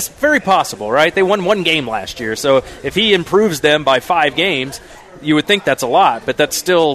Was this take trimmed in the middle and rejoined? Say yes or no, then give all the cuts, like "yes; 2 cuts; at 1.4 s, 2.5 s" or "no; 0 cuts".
no; 0 cuts